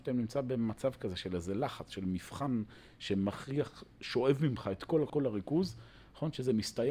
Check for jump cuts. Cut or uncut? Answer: cut